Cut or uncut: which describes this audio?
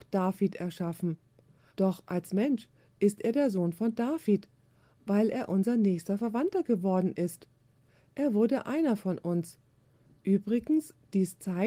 uncut